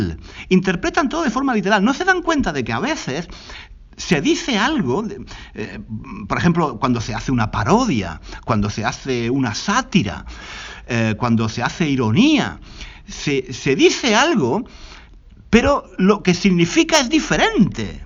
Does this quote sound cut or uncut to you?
uncut